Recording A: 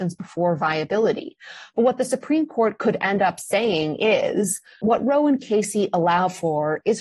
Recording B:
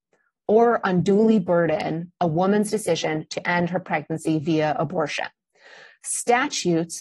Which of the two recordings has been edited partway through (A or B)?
A